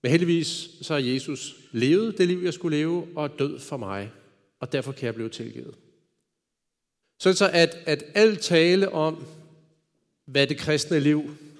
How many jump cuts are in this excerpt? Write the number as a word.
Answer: one